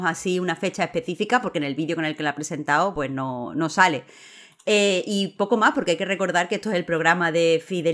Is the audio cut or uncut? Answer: uncut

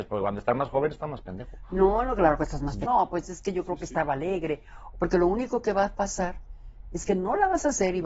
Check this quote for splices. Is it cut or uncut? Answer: cut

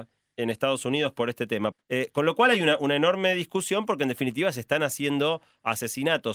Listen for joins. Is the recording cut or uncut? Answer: cut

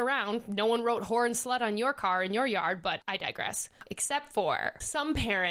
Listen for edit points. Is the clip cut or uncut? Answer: cut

